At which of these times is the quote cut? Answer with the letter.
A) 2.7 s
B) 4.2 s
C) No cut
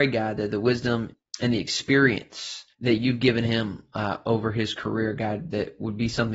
A